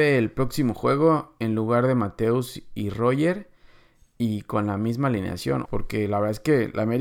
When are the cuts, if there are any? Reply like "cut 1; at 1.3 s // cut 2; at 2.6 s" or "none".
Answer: cut 1; at 5.7 s